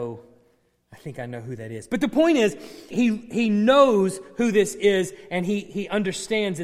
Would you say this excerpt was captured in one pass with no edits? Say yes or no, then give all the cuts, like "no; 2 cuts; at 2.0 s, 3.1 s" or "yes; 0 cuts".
no; 1 cut; at 2.9 s